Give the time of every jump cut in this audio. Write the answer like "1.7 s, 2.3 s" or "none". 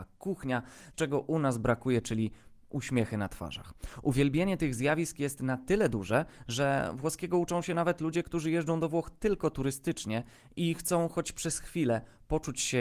0.9 s